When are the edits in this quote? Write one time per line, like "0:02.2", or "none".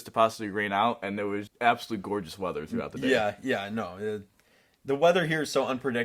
0:01.5

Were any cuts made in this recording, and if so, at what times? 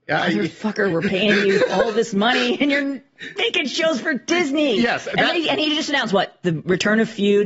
none

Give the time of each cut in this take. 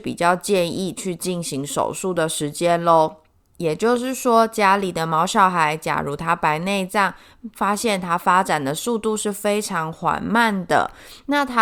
0:07.5

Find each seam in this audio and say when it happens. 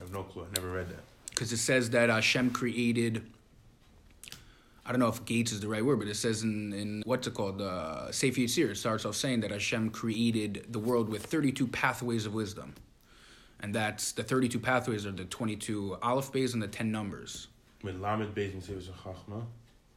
0:07.0

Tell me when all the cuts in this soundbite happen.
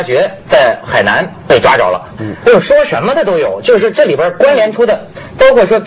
0:02.2

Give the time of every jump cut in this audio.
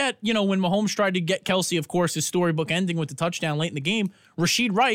none

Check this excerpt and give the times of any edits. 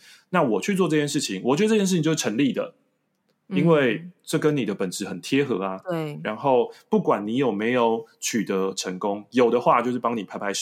none

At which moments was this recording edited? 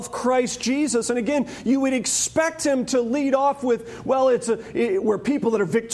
none

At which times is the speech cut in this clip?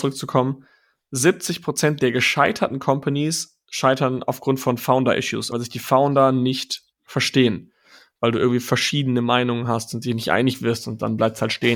0:05.5
0:06.9

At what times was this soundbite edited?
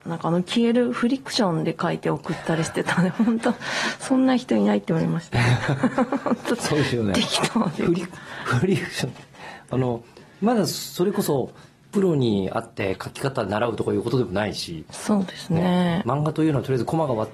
none

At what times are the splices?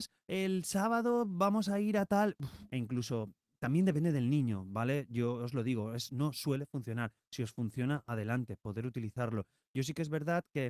0:02.7

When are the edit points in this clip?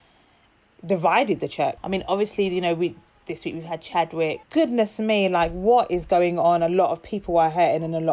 0:01.8
0:04.4

